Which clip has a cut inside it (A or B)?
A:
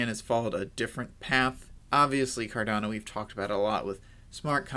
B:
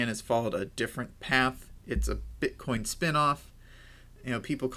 A